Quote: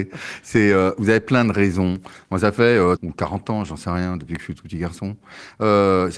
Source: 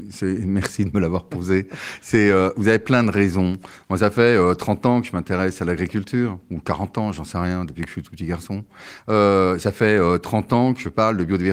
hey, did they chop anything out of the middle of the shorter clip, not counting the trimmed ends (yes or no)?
yes